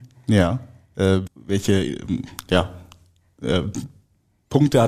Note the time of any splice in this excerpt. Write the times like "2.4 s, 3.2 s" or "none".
1.3 s